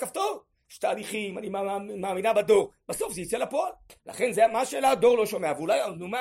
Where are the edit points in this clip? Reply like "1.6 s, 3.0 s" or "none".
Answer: 4.0 s